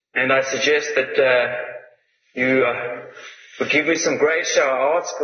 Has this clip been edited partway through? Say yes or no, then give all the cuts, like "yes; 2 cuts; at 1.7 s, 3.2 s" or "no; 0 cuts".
no; 0 cuts